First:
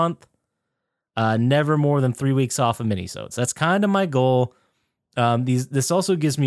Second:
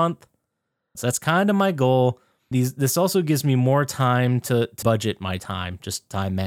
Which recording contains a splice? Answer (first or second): second